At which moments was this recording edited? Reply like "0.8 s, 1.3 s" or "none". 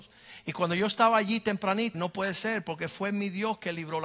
1.9 s